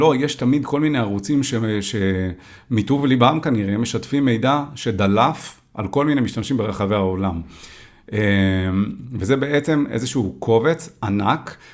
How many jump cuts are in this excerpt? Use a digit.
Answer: 0